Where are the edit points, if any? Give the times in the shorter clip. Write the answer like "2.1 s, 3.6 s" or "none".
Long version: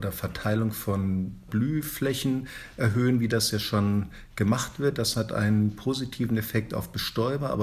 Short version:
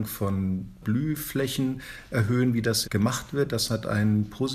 2.8 s